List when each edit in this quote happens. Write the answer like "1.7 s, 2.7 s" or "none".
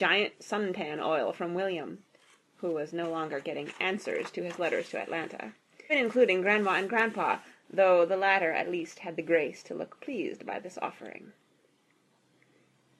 5.9 s